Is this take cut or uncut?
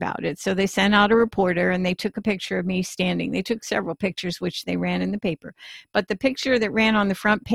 uncut